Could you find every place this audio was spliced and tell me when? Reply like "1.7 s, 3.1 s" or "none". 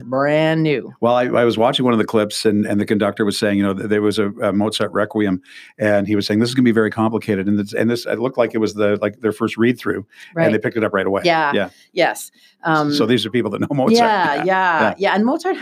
none